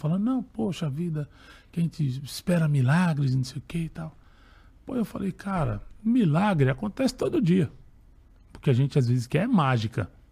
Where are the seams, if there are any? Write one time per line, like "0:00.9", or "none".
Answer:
none